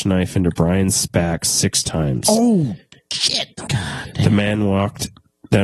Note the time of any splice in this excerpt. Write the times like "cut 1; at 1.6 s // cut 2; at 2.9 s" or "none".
cut 1; at 3.7 s